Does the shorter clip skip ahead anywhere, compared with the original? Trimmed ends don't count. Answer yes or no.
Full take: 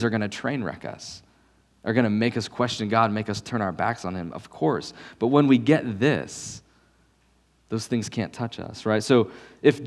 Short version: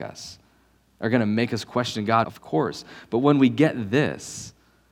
yes